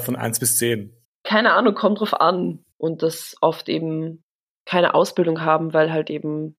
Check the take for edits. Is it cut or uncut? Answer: cut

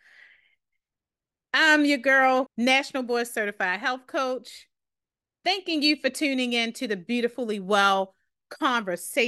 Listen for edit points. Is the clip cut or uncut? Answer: cut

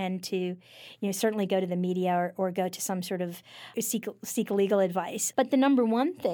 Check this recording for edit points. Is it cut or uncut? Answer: cut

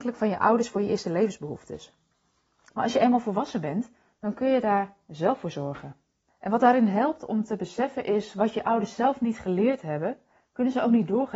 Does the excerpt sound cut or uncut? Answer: cut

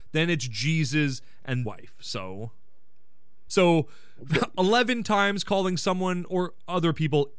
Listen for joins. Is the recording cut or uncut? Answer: cut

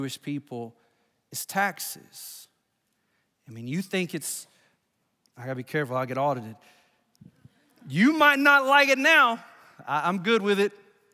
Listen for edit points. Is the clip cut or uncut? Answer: uncut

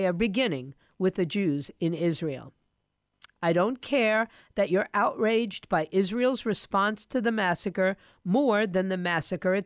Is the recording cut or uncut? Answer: cut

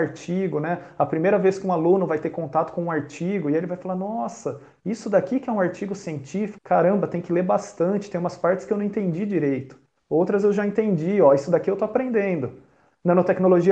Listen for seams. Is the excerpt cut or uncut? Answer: cut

